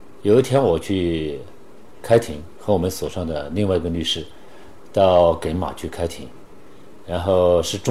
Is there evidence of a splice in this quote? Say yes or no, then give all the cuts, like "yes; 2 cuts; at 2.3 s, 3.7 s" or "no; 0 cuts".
no; 0 cuts